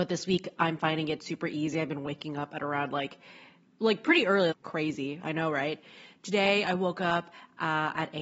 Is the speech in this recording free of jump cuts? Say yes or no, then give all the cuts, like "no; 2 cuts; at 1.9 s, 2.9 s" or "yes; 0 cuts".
no; 1 cut; at 4.5 s